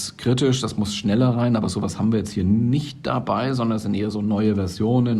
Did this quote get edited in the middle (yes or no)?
no